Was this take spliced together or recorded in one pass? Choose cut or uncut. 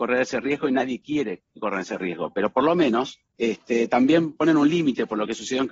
cut